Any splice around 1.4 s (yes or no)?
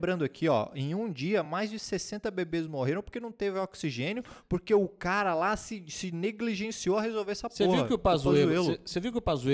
no